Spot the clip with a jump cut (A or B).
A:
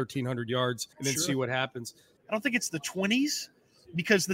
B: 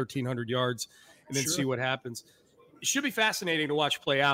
A